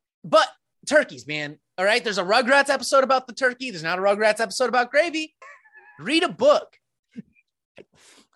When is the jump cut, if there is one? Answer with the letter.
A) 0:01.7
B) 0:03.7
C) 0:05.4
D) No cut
C